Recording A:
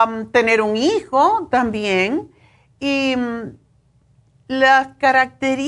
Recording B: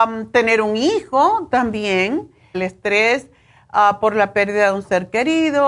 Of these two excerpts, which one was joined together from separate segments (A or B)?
B